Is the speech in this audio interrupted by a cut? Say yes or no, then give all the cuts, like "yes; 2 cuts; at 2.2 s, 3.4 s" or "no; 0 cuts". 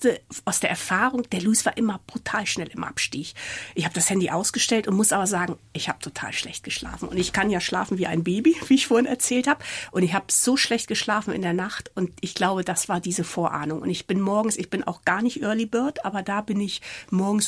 no; 0 cuts